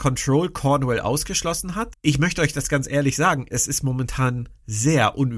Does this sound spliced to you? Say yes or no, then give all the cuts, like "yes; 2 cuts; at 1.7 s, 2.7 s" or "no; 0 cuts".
yes; 2 cuts; at 1.9 s, 3.5 s